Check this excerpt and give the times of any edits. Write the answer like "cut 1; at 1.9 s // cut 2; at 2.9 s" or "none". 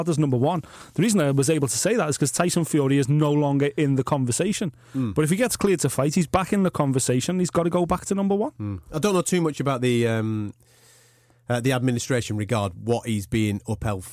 none